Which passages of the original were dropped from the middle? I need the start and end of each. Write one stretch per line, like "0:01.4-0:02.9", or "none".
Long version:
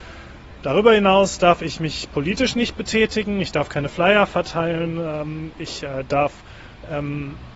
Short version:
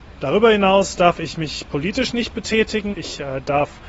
0:03.3-0:05.5